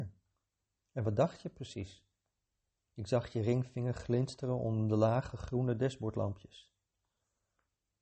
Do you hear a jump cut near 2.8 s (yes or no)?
yes